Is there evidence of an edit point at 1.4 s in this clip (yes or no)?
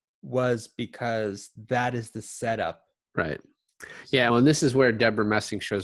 no